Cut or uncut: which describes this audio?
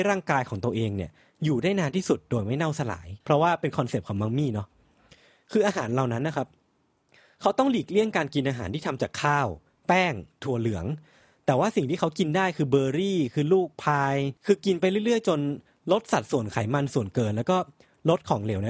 cut